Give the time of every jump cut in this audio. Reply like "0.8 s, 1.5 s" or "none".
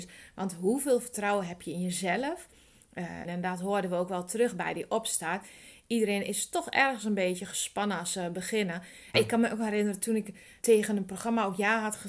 3.2 s, 9.1 s, 10.6 s